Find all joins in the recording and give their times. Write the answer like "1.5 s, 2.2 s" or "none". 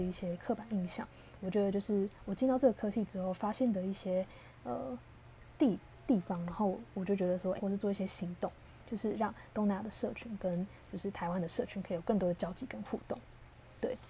7.6 s, 8.8 s